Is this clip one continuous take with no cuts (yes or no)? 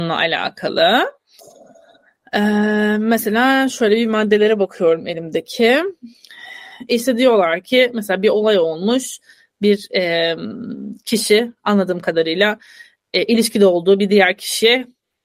yes